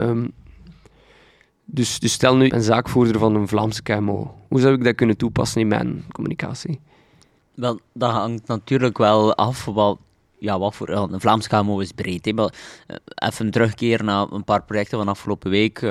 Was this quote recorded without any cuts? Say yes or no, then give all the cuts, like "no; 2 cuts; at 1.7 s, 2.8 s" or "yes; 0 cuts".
no; 1 cut; at 2.5 s